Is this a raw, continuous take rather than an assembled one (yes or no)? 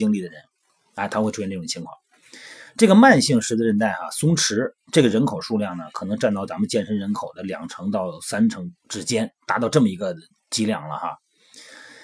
yes